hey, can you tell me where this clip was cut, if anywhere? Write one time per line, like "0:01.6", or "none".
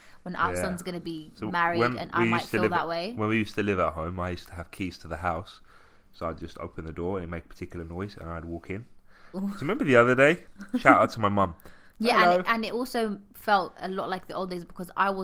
0:09.3
0:11.9